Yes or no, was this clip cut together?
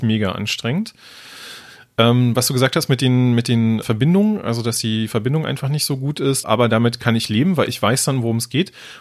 yes